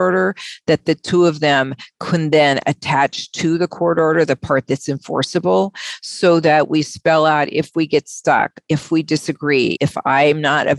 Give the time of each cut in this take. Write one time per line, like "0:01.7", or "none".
0:09.8